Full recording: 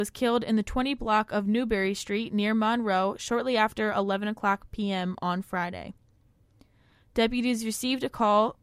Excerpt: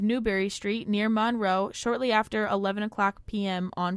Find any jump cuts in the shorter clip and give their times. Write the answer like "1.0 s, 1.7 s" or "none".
none